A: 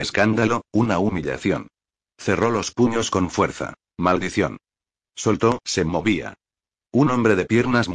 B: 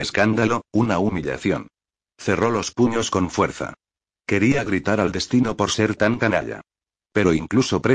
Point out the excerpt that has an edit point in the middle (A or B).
A